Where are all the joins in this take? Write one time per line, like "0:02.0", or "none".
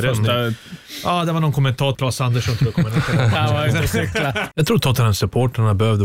0:01.9
0:04.5